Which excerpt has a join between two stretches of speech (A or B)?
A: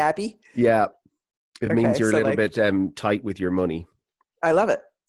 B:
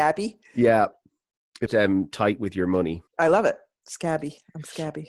B